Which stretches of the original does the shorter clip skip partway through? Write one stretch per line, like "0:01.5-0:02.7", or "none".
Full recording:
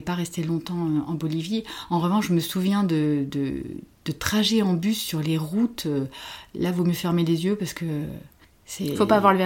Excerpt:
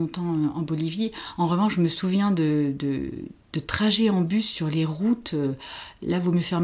none

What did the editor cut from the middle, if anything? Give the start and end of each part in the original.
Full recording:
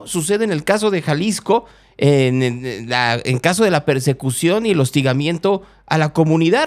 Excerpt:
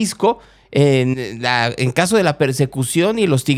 0:02.4-0:02.6

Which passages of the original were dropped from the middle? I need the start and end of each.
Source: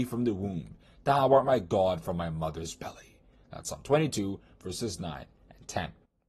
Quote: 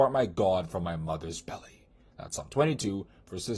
none

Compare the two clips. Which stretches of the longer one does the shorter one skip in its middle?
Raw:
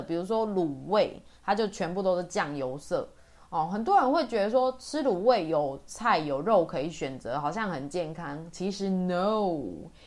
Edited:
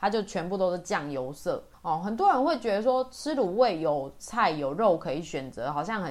0:03.2-0:03.4

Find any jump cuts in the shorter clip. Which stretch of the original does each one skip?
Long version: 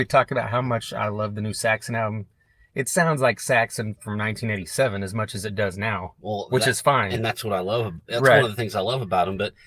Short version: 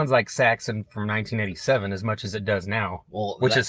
none

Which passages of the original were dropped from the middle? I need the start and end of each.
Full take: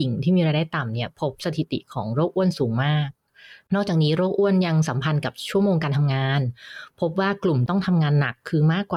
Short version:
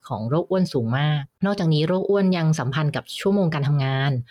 0:03.2-0:03.6

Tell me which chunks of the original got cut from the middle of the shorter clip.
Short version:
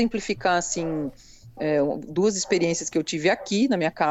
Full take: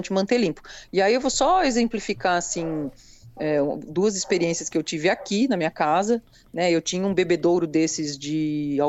none

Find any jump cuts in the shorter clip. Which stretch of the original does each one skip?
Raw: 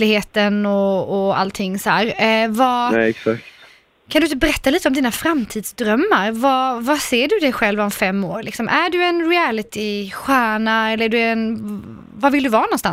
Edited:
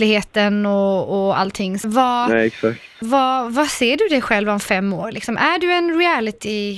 0:01.8-0:02.5
0:03.6-0:06.3

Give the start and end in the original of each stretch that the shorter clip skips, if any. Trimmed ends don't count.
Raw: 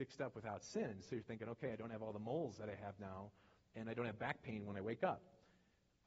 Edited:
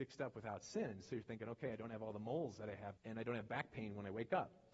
0:03.0-0:03.7

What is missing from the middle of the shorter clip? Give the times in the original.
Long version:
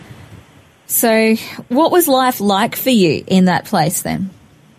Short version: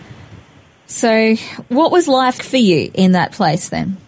0:02.4-0:02.7

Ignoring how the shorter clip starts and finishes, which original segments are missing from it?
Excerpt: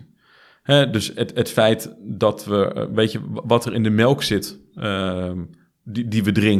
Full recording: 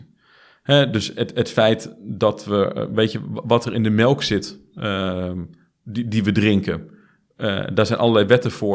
none

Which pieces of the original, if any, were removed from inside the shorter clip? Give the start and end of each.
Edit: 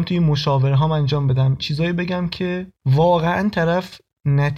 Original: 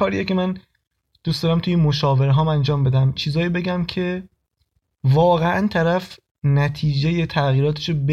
0:04.3-0:04.9

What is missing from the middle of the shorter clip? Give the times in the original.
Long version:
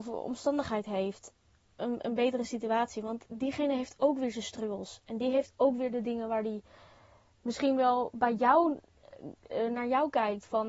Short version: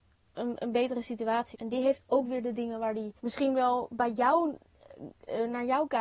0:02.9-0:05.0
0:06.7-0:07.4

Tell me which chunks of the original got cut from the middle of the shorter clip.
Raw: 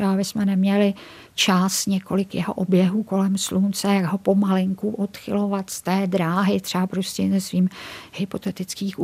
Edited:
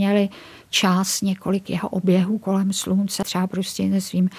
0:03.9-0:06.6

